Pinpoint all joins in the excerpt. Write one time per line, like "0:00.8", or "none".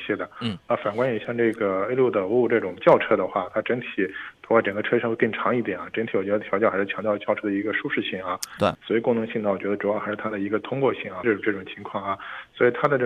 0:08.7
0:11.2